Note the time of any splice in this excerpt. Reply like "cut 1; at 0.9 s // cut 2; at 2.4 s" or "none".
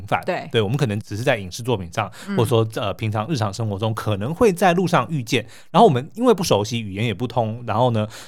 cut 1; at 1.0 s

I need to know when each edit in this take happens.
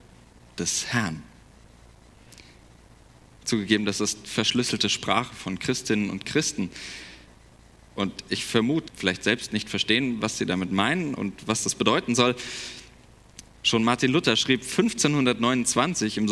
cut 1; at 8.9 s // cut 2; at 13.5 s

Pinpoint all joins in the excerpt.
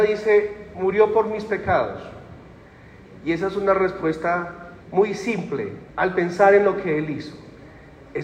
cut 1; at 4.8 s // cut 2; at 5.9 s

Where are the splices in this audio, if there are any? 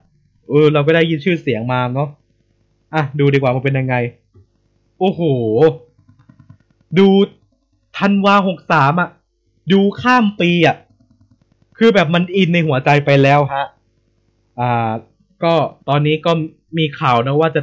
cut 1; at 15.8 s

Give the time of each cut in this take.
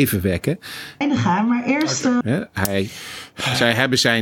cut 1; at 1.0 s // cut 2; at 2.2 s

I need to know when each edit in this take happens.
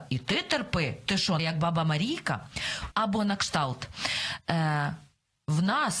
cut 1; at 1.4 s // cut 2; at 2.9 s

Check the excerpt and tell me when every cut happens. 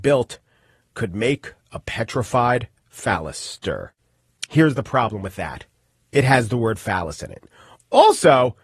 none

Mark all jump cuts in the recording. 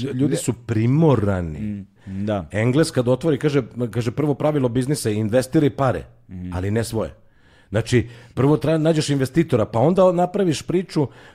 cut 1; at 2.0 s

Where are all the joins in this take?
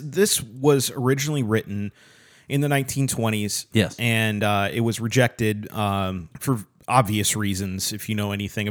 cut 1; at 3.7 s // cut 2; at 6.3 s

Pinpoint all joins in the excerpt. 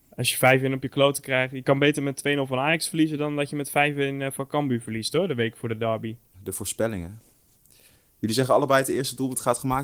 cut 1; at 6.3 s

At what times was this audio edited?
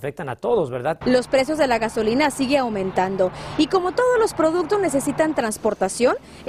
cut 1; at 1.0 s

